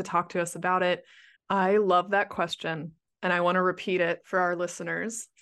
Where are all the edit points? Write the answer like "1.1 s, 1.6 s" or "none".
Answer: 1.4 s